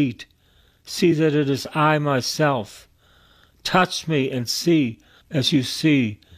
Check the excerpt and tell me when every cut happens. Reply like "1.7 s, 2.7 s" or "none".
5.2 s